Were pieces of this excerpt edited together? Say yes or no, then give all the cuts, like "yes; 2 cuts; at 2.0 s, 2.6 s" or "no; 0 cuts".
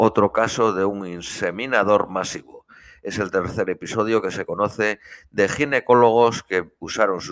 no; 0 cuts